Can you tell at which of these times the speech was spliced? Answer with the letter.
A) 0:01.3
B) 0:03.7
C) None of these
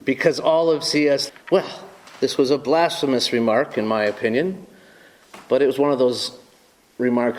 A